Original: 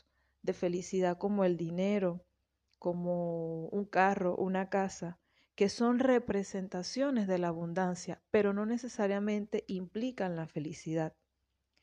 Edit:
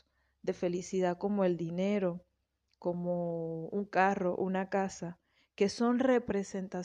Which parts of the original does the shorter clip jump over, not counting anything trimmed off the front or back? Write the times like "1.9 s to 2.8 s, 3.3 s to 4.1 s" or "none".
none